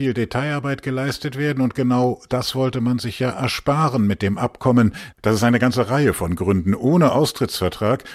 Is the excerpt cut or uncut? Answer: cut